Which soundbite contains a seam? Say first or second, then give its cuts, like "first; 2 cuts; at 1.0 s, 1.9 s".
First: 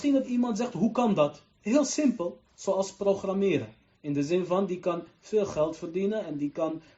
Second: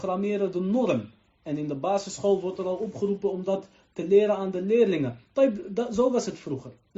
first; 2 cuts; at 2.5 s, 3.9 s